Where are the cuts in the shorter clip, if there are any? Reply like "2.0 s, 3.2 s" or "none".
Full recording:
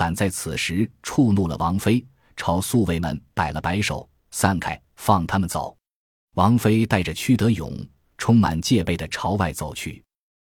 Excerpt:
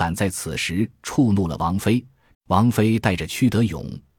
2.3 s